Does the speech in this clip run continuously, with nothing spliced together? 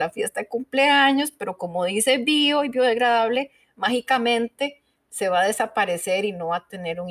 yes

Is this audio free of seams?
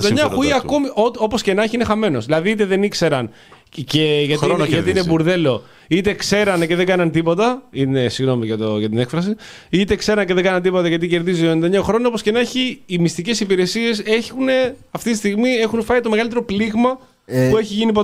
yes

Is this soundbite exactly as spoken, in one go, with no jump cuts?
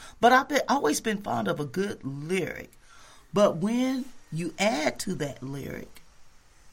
yes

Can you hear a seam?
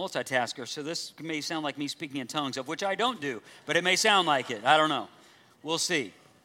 no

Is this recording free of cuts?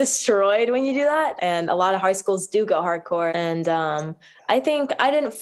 no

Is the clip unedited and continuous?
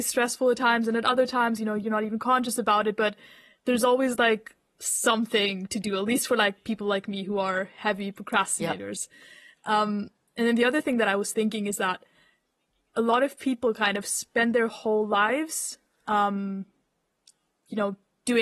yes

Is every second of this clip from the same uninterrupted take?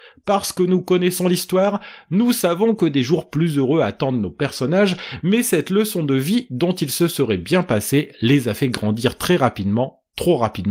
yes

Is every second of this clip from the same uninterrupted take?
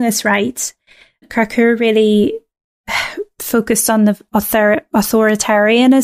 no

